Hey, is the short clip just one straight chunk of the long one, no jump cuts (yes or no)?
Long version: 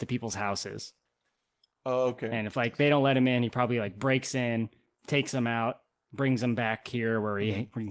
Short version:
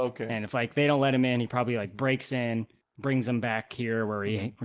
no